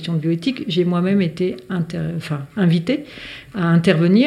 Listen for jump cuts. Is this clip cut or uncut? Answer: uncut